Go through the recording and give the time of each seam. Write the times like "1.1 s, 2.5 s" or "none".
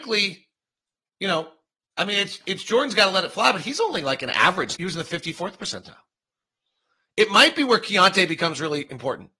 4.7 s